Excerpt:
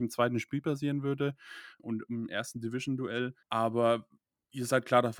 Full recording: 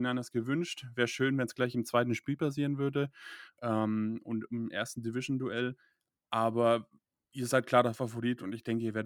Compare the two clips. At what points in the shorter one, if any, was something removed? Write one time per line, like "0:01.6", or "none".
0:01.8
0:03.4